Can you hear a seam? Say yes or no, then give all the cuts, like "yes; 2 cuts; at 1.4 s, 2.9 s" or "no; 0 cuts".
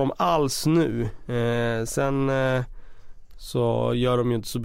no; 0 cuts